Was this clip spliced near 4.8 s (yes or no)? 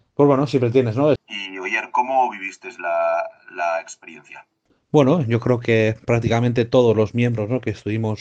no